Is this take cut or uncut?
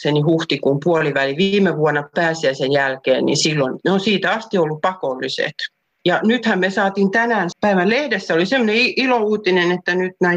cut